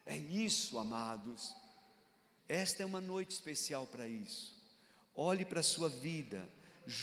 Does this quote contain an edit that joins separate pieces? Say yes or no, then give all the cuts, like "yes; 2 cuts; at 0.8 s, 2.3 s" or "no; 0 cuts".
yes; 1 cut; at 2.4 s